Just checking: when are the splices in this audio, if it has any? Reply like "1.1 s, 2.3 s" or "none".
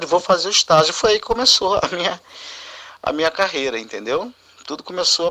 none